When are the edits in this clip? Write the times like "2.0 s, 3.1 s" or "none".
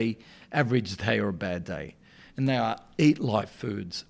none